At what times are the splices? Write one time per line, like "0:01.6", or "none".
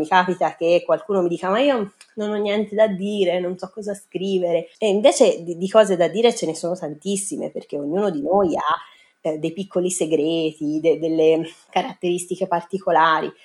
0:04.7